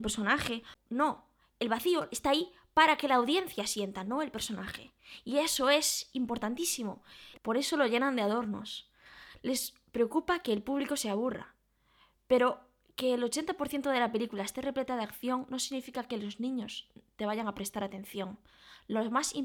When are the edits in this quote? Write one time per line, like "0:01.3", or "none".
0:07.3